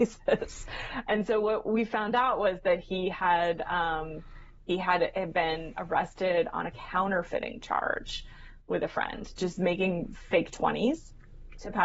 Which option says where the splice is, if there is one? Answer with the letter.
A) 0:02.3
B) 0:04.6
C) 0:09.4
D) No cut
C